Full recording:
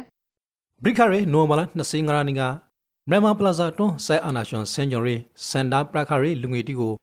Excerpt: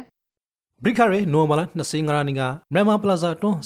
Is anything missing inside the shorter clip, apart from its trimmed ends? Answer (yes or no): yes